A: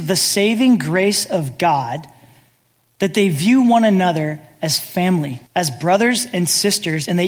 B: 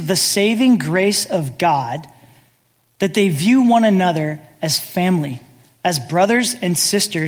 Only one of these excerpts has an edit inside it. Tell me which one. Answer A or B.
A